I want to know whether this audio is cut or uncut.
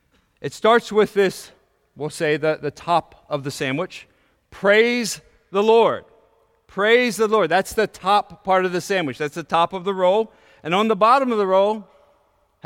uncut